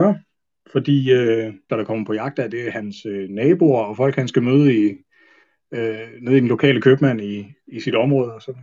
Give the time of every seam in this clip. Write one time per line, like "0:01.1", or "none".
0:01.7